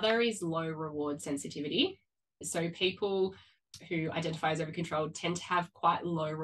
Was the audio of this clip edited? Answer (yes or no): yes